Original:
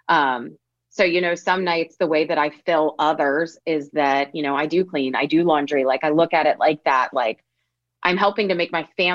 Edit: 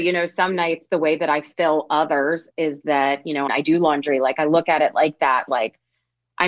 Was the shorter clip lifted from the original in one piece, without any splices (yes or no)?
no